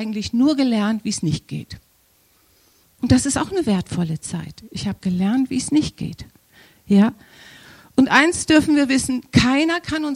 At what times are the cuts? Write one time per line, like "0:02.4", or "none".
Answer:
0:02.8